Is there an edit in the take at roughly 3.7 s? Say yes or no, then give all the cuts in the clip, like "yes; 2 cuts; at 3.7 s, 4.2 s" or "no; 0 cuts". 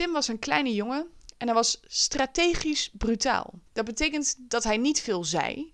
yes; 1 cut; at 3.7 s